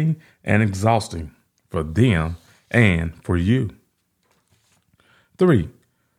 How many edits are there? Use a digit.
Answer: 0